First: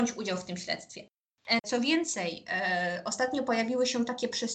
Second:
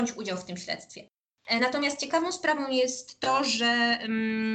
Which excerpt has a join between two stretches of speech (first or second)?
first